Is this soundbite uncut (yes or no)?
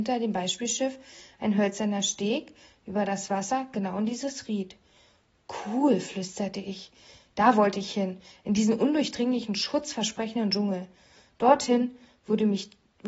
yes